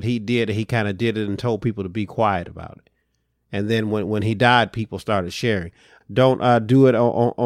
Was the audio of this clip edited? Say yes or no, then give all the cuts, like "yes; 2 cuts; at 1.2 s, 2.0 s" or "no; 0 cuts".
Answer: yes; 1 cut; at 6.0 s